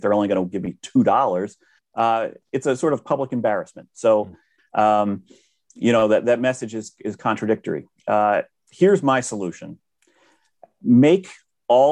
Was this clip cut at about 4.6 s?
yes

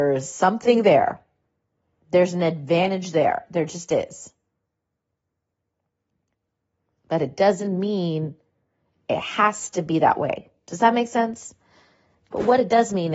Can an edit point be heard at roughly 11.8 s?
no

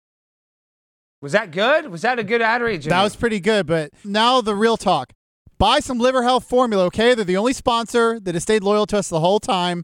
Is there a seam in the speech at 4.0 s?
yes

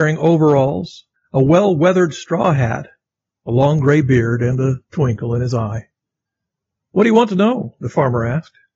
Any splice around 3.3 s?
no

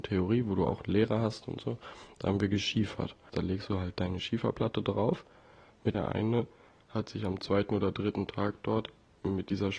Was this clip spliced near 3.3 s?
yes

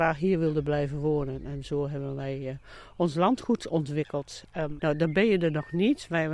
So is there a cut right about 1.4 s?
no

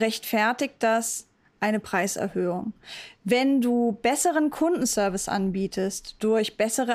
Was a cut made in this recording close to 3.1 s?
no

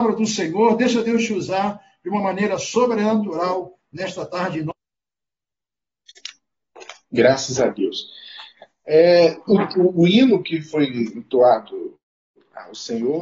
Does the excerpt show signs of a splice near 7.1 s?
no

